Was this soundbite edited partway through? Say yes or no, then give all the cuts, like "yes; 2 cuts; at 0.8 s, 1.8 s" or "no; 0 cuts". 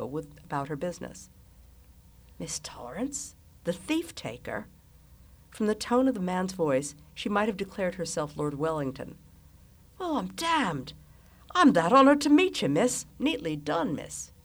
yes; 1 cut; at 13.1 s